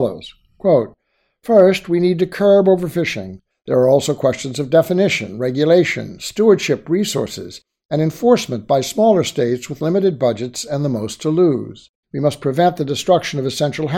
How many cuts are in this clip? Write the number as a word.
two